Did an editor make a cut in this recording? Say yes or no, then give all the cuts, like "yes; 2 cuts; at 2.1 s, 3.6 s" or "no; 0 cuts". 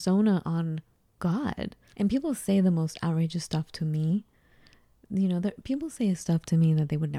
yes; 1 cut; at 1.9 s